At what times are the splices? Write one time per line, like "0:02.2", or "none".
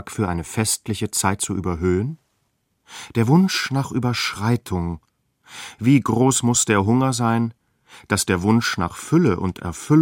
none